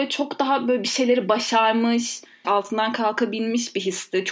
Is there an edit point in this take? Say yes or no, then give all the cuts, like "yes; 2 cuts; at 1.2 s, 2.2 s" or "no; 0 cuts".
yes; 1 cut; at 2.4 s